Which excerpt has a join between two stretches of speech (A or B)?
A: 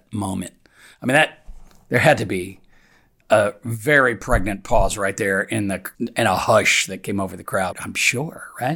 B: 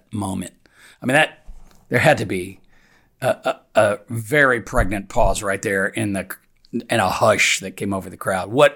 A